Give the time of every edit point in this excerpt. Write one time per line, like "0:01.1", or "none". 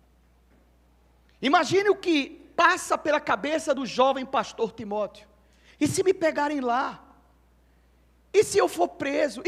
none